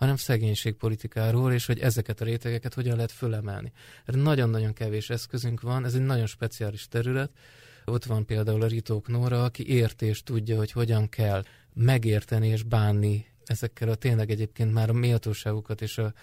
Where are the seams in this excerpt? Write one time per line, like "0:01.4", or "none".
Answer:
none